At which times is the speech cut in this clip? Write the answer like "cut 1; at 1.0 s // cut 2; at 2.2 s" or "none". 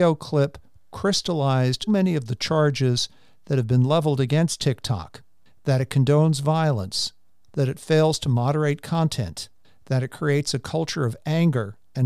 cut 1; at 1.9 s